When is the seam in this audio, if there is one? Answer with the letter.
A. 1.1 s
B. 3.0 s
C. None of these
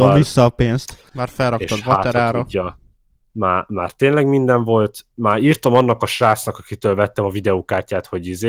A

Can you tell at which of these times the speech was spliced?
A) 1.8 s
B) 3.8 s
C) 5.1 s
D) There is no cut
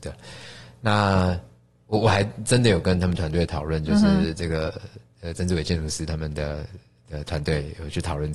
C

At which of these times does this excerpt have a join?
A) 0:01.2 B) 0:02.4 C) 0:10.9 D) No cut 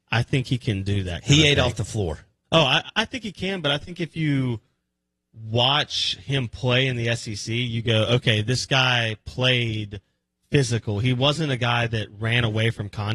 B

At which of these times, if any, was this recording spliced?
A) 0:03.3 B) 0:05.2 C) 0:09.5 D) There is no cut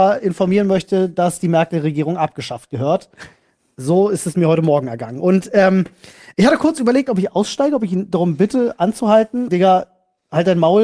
C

